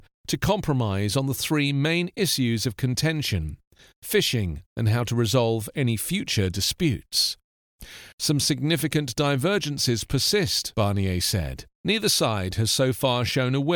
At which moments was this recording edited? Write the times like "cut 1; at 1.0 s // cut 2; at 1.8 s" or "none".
cut 1; at 4.7 s // cut 2; at 8.1 s